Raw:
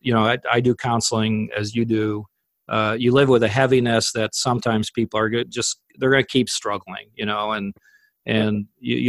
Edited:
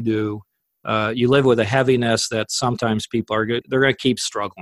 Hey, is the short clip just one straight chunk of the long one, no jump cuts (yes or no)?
no